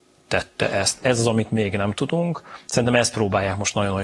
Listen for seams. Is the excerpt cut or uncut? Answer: uncut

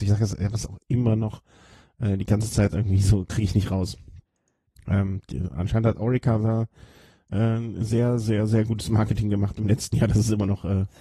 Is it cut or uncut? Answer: uncut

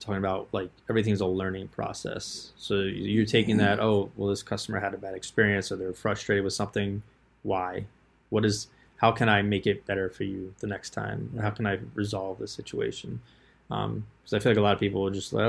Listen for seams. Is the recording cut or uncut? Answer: uncut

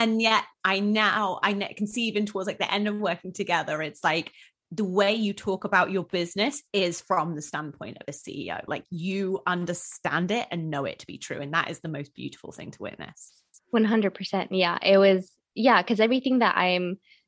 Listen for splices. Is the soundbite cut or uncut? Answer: cut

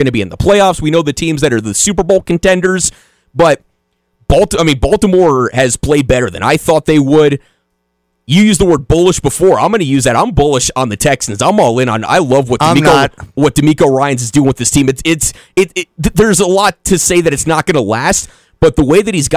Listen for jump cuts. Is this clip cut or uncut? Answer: uncut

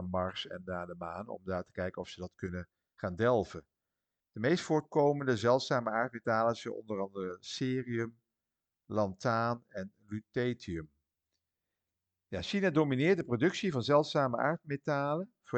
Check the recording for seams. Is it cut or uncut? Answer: uncut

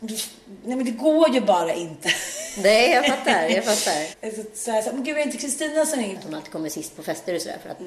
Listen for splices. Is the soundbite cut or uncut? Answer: cut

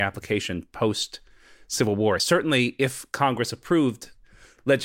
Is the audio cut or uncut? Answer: uncut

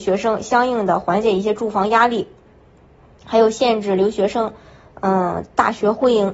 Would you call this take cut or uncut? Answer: uncut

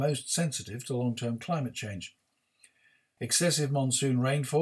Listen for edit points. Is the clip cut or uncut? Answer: cut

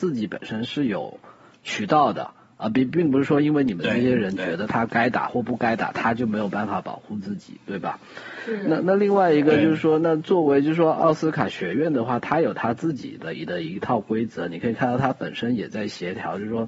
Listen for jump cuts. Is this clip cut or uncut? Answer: uncut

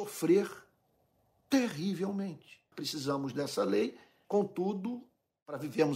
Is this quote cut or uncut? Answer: cut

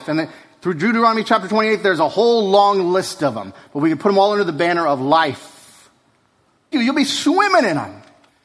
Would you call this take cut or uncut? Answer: cut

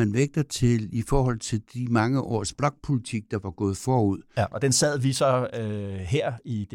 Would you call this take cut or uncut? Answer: cut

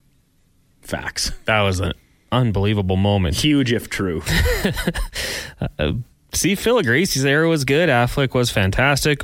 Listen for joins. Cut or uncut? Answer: uncut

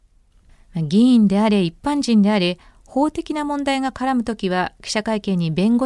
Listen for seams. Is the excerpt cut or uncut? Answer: uncut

